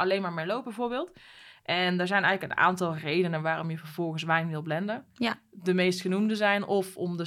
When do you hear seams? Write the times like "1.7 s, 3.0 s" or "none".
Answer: none